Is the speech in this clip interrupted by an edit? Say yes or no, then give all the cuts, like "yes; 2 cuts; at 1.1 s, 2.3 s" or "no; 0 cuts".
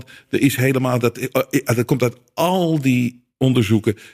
no; 0 cuts